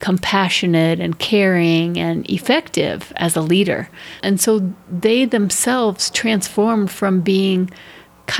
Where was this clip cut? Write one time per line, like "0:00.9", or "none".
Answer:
0:04.2